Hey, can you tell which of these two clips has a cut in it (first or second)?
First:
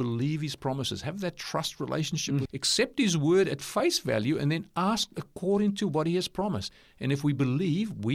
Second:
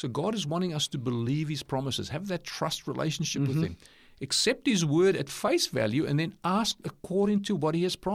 first